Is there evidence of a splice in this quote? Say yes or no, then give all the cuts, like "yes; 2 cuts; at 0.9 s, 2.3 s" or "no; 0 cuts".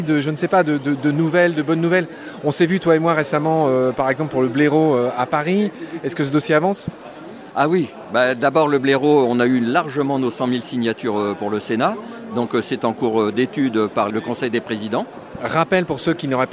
no; 0 cuts